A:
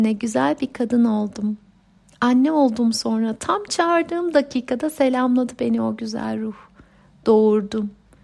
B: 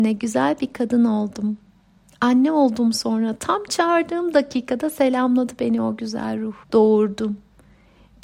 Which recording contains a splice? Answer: B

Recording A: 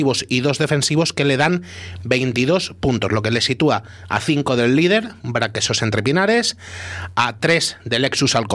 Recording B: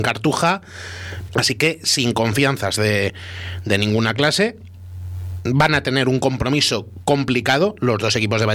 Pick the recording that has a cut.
B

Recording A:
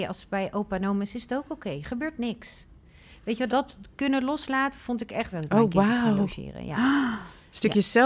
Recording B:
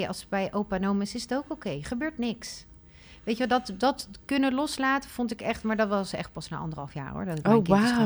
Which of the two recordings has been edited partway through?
A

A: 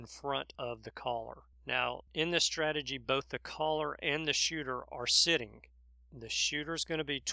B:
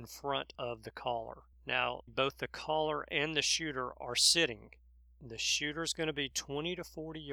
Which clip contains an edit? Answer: B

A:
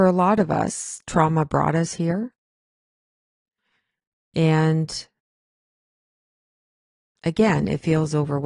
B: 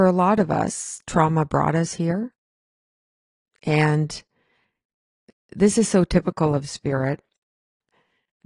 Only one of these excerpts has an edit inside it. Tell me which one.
B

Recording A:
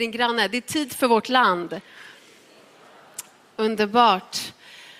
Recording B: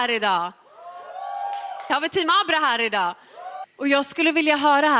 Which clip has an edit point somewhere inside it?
B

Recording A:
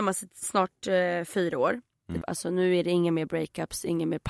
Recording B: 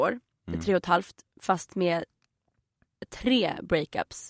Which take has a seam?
A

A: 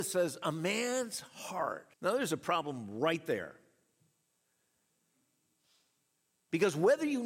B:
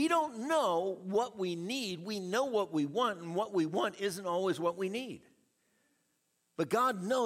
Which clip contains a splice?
A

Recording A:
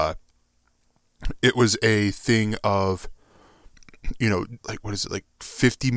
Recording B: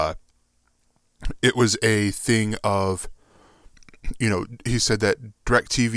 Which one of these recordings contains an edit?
A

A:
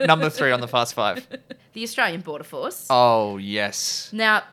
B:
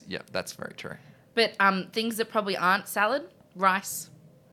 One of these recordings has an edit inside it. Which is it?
A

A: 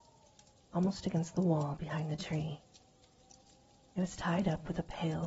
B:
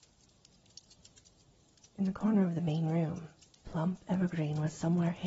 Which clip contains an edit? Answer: B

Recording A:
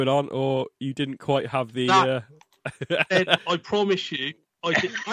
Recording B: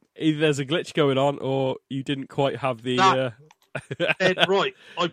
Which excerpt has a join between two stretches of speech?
A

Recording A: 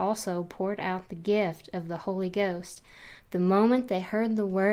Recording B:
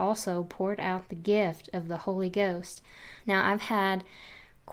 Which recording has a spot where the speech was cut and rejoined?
B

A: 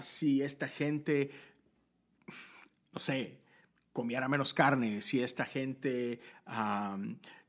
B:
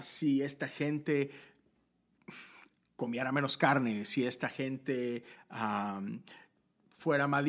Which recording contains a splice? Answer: B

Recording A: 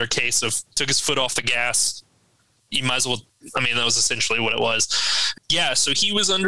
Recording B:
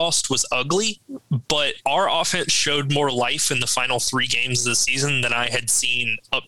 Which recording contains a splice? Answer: A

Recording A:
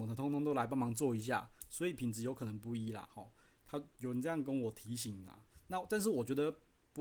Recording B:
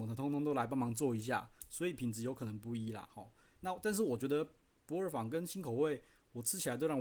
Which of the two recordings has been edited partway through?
B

